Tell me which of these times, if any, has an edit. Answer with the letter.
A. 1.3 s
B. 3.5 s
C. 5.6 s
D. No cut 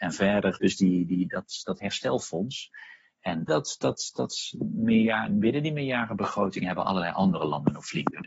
B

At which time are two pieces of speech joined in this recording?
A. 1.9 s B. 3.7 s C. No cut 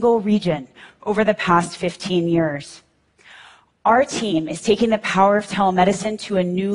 C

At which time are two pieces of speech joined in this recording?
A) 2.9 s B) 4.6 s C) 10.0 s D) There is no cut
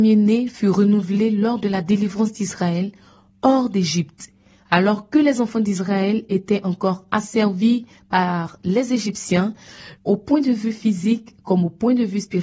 C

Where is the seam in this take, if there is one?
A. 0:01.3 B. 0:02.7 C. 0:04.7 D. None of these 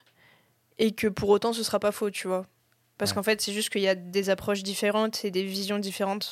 D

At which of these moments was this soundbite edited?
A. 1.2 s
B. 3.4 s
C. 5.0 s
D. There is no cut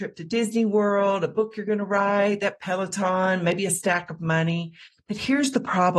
D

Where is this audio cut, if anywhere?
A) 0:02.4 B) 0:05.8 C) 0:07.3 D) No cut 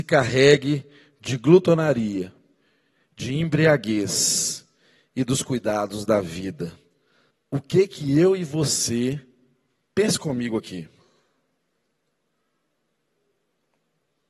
C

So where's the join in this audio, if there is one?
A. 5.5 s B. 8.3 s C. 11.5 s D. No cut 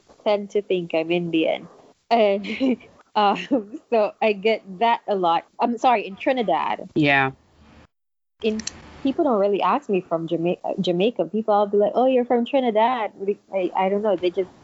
A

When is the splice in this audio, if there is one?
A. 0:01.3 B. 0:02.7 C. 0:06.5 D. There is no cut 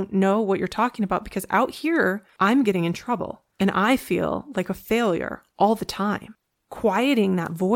D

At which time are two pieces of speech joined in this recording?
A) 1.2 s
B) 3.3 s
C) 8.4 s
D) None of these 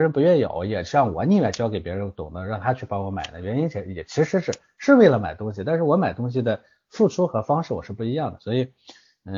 C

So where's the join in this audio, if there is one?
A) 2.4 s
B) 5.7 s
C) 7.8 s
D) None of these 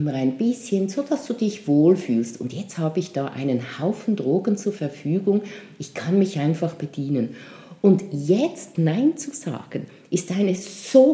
D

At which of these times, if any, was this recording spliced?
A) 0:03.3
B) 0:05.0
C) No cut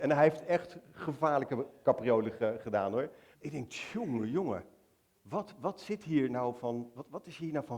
A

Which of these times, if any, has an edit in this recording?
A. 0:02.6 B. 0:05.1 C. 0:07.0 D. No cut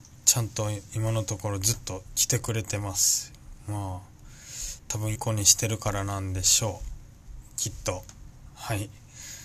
B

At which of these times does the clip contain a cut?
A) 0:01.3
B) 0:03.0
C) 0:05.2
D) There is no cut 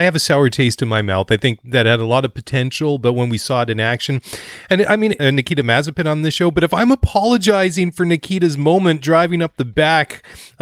C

